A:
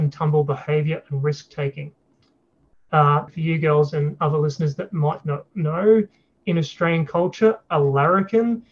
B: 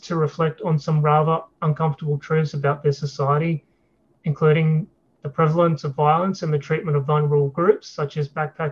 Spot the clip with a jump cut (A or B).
A